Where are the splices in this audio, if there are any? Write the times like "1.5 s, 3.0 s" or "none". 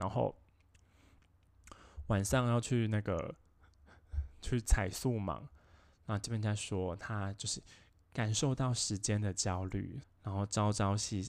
10.0 s

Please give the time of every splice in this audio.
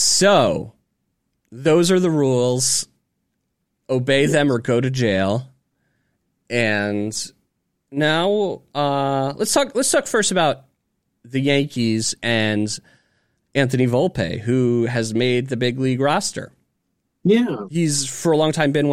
none

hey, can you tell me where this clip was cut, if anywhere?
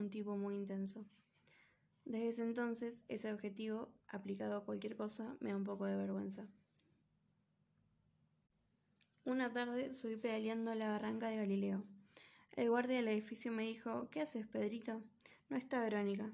none

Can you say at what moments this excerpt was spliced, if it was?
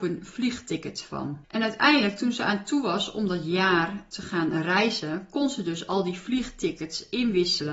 1.4 s

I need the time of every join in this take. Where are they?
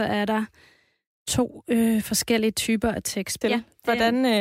3.4 s

